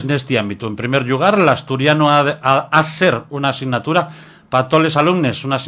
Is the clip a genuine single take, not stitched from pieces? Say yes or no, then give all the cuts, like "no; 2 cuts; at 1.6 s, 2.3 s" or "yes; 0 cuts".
yes; 0 cuts